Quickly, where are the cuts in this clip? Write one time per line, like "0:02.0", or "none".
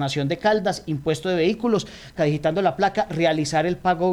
0:02.2